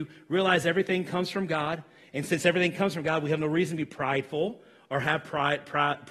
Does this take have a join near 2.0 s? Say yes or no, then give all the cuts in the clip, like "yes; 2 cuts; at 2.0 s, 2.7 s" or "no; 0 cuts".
no; 0 cuts